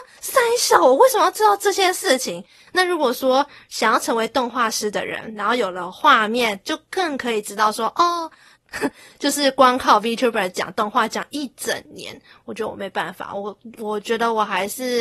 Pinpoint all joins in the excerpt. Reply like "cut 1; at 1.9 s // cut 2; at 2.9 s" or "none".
cut 1; at 8.6 s